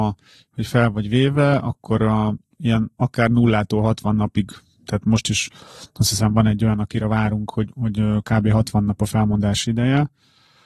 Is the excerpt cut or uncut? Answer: uncut